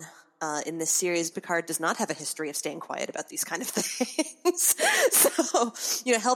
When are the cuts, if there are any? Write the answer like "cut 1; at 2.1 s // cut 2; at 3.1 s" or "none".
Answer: cut 1; at 1.3 s